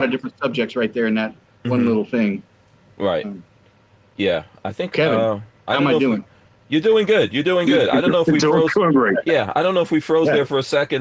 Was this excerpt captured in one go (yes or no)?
yes